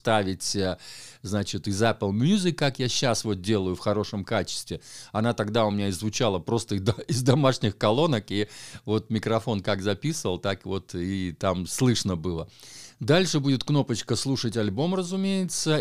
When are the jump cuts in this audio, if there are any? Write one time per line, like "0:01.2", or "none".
0:12.9